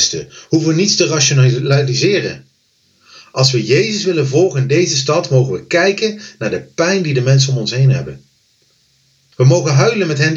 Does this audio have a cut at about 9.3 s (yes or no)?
yes